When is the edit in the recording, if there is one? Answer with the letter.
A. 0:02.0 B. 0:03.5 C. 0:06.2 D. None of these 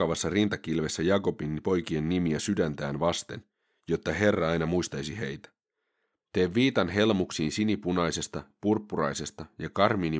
C